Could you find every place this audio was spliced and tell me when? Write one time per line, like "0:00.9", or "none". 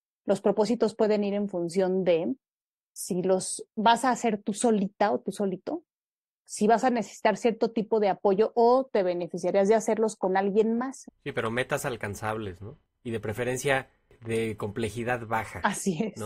0:11.1